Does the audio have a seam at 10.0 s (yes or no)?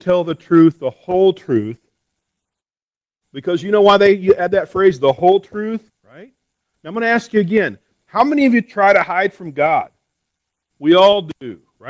no